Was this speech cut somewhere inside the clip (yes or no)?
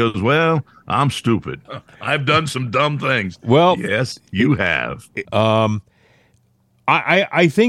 yes